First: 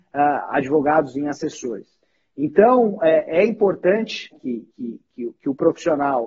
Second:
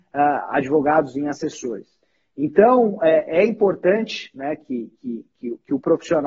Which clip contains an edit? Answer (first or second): first